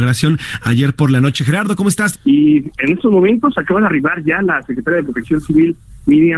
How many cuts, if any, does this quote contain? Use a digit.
1